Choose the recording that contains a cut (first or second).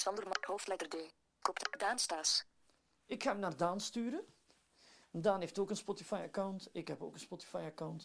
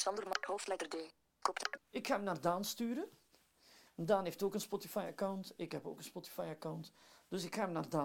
second